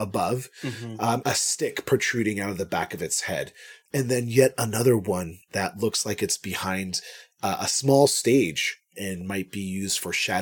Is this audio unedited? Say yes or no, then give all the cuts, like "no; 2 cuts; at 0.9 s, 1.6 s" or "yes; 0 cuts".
no; 2 cuts; at 1.2 s, 3.9 s